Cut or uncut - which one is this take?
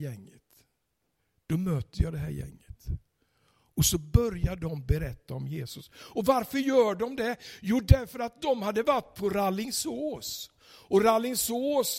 uncut